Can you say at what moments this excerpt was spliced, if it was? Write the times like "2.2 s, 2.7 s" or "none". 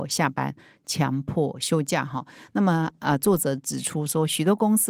none